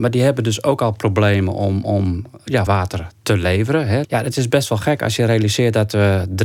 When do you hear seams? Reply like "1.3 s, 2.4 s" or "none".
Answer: 2.7 s, 4.0 s